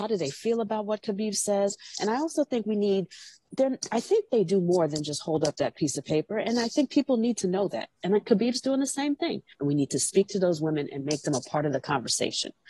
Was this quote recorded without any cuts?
no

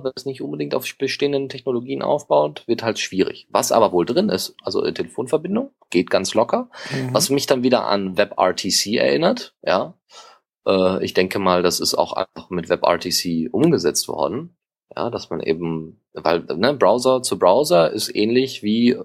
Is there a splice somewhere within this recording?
yes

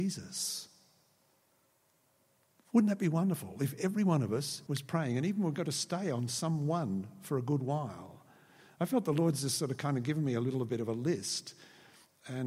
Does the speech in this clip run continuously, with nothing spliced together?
no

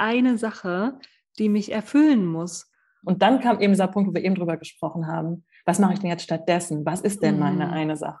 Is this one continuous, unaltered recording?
no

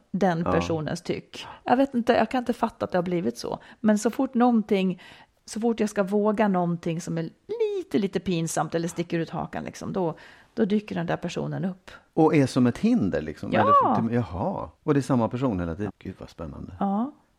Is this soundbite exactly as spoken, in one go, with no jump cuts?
no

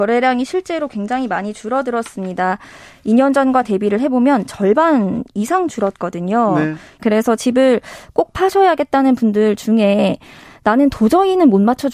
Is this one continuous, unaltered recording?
no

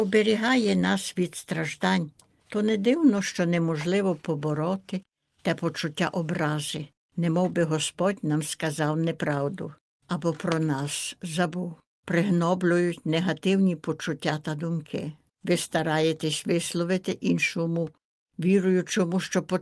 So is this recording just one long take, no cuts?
no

